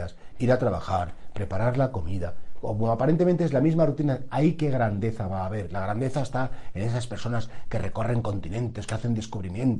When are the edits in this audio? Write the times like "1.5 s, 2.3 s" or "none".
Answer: none